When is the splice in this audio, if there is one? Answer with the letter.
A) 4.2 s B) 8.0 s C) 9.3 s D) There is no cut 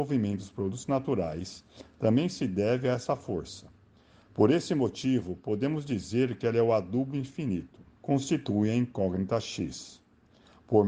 B